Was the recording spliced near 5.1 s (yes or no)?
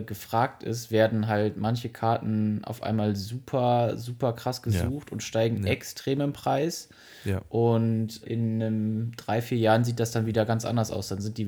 no